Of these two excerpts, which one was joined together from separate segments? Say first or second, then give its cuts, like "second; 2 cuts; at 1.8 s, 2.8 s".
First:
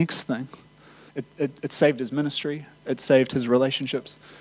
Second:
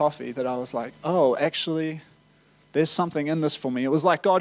first; 1 cut; at 1.1 s